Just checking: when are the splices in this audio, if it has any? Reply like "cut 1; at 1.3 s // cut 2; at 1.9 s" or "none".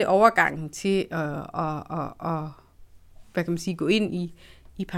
none